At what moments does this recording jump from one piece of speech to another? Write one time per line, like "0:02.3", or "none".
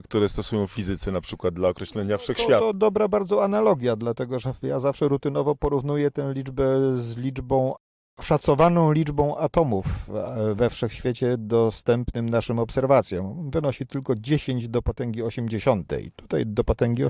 none